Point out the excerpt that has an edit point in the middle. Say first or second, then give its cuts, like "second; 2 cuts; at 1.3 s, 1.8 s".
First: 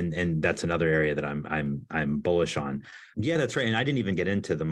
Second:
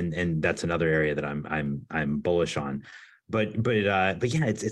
first; 1 cut; at 3.1 s